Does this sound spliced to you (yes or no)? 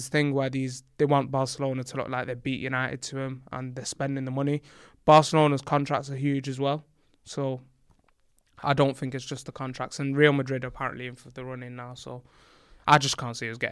no